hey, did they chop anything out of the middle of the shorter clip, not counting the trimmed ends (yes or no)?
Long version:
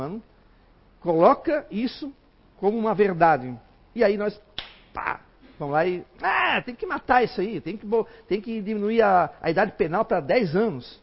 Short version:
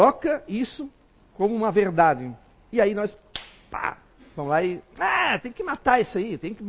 no